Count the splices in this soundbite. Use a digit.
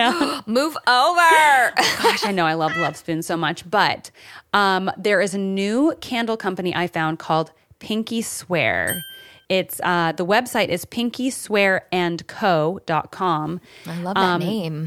0